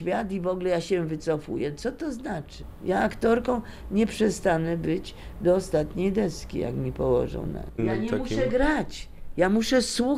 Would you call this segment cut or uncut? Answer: uncut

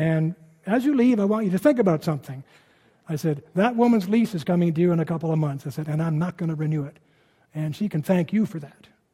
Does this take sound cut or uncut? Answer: uncut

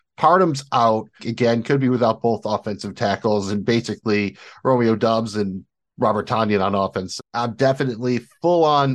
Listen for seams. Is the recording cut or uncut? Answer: cut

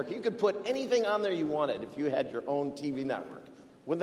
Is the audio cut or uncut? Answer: uncut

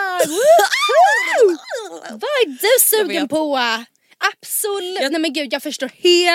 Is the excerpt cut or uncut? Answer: uncut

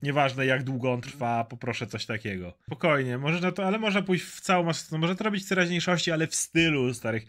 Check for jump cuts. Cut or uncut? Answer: cut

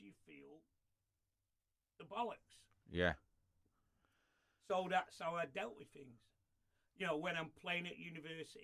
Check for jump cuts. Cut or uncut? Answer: uncut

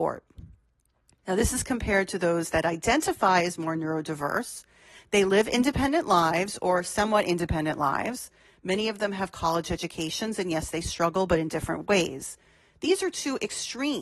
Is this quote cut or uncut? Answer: uncut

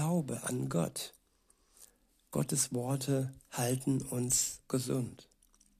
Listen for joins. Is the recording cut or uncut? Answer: uncut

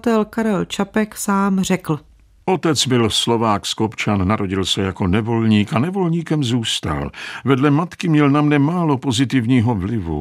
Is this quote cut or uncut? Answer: uncut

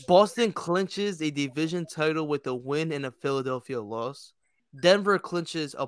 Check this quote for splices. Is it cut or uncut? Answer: cut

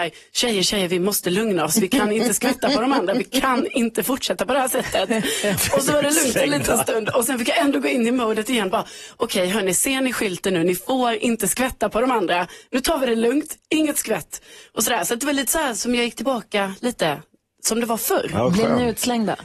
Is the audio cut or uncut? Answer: uncut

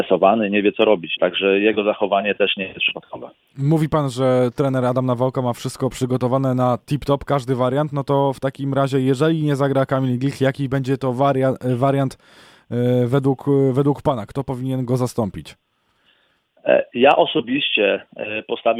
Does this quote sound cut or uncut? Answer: cut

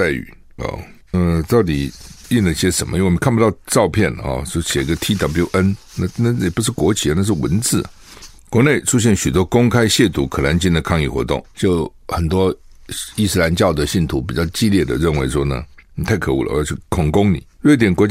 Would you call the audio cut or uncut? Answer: cut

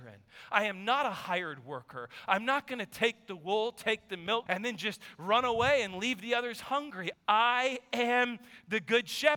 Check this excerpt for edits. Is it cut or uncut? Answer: cut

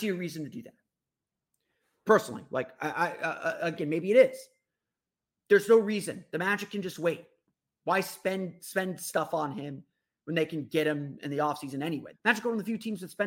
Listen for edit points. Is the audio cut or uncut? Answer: cut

